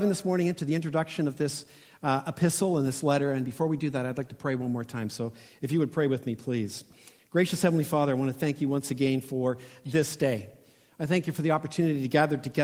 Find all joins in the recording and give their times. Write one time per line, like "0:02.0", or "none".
none